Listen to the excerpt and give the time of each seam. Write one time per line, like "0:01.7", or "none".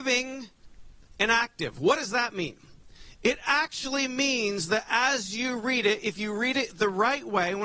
0:03.2